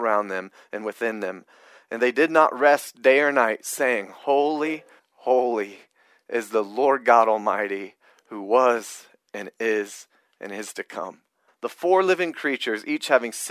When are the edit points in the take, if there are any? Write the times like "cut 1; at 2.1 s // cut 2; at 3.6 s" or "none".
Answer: cut 1; at 5.0 s // cut 2; at 11.5 s